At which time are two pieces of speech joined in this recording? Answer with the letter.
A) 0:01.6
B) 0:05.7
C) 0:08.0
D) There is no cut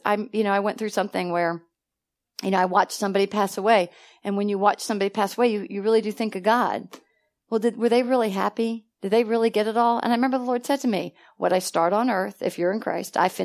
D